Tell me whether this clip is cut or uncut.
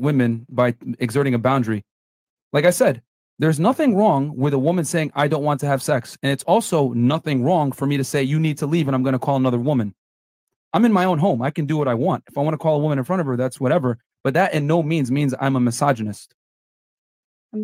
uncut